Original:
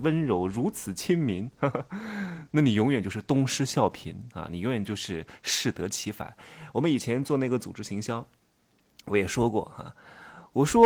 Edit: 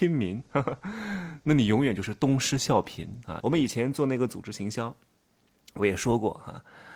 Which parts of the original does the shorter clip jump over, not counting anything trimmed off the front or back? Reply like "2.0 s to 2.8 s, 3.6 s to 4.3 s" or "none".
4.5 s to 6.7 s